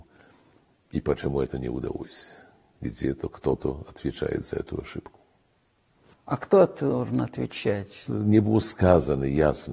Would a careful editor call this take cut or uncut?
cut